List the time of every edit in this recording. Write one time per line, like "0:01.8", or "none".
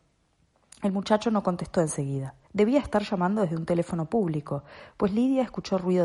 0:02.4